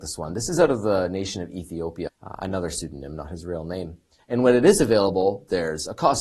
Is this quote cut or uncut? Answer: cut